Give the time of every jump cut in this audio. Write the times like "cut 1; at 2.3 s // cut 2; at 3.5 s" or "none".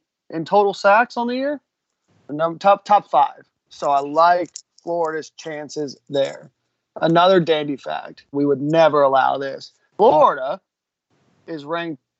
cut 1; at 8.3 s // cut 2; at 9.9 s